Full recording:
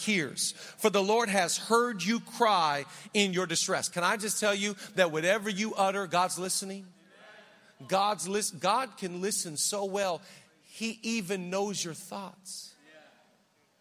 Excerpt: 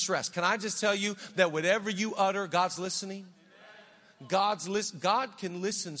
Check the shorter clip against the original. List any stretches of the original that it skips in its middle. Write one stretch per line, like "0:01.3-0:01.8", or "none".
none

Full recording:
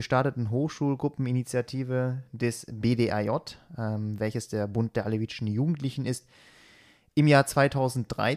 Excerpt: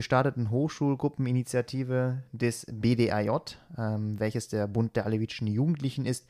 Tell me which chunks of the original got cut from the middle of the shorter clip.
none

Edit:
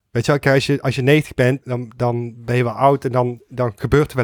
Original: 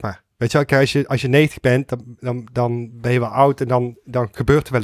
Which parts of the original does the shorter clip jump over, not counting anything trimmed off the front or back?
0:01.9-0:02.2

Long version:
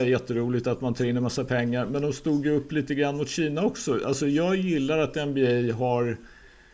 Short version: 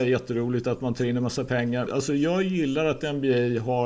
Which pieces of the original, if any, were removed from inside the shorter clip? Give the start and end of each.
0:01.9-0:04.0

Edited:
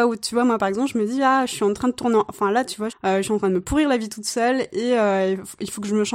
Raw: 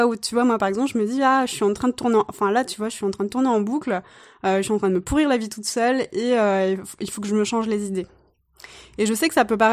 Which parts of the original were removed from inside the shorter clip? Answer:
0:02.9-0:04.3

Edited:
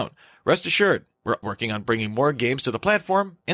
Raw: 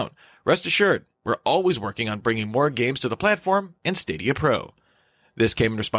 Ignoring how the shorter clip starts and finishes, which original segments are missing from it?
0:01.4-0:01.8

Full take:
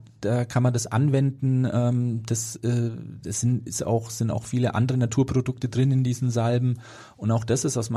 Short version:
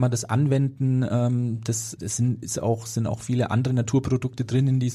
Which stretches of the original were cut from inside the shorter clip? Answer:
0:02.6-0:03.2

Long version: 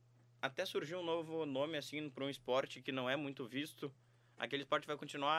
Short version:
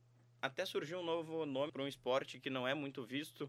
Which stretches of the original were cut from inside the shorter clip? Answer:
0:01.7-0:02.1

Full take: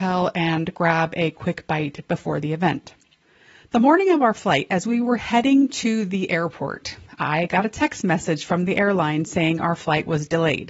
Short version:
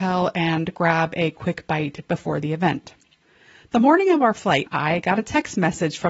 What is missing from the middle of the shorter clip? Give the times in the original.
0:04.7-0:07.1

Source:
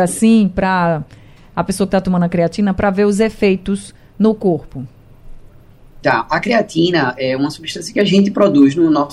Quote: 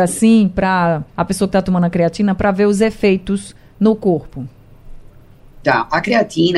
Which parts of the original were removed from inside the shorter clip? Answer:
0:01.1-0:01.5

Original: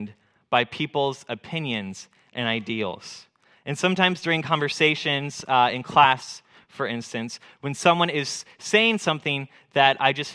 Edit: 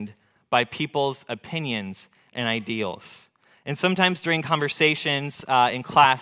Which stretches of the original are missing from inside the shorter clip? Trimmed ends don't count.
none

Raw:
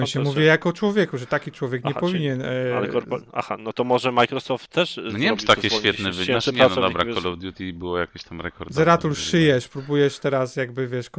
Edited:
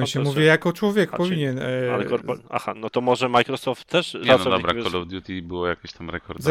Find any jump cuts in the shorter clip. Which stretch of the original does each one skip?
0:01.1-0:01.9
0:05.0-0:06.5

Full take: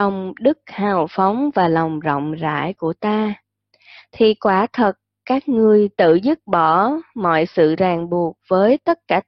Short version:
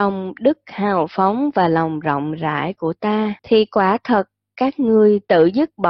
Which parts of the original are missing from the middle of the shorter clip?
0:03.4-0:04.1

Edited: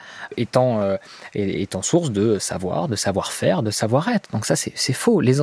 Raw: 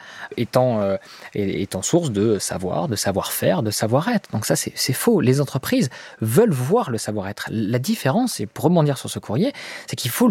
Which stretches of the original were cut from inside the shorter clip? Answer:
none

